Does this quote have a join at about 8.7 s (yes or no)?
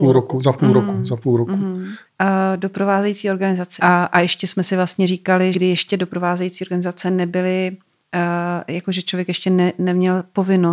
no